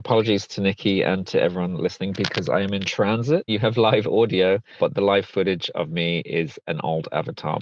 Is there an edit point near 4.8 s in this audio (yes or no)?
yes